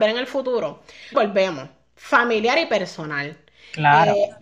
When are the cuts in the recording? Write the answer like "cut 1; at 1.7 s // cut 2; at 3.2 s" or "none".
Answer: cut 1; at 1.1 s